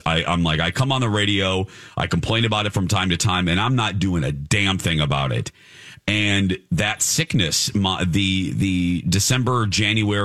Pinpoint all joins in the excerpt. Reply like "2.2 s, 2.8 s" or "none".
none